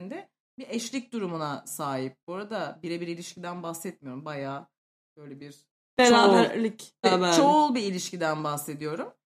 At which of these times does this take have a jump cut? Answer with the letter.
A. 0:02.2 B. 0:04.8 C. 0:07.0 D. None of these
C